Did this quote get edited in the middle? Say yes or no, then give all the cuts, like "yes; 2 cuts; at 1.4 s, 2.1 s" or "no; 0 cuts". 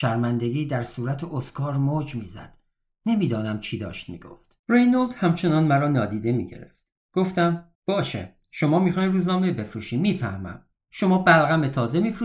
yes; 2 cuts; at 4.6 s, 7.7 s